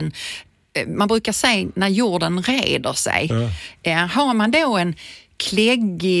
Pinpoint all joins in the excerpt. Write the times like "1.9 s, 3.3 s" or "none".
none